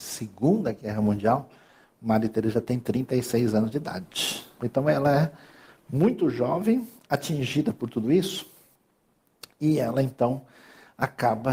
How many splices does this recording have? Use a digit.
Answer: 1